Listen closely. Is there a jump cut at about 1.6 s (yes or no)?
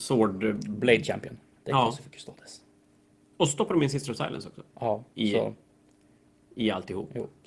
yes